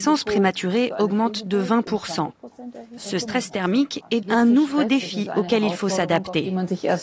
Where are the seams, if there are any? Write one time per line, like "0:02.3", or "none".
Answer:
0:03.0
0:04.2